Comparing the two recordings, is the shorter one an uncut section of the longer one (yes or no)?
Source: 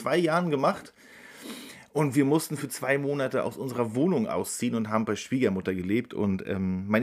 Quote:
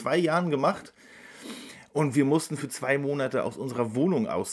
yes